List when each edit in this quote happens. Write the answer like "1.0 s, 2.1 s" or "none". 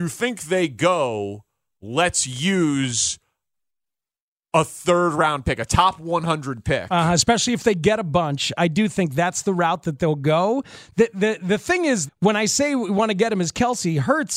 12.1 s